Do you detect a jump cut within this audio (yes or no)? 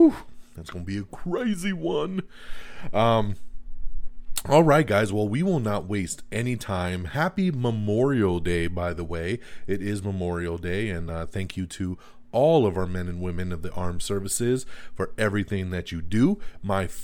no